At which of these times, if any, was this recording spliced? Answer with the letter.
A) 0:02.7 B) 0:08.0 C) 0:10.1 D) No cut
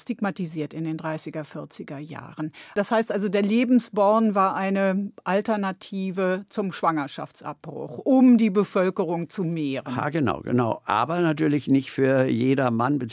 A